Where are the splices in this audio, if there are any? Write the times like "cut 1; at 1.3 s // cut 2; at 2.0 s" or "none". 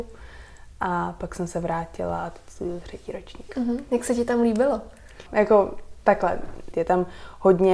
cut 1; at 5.3 s // cut 2; at 6.7 s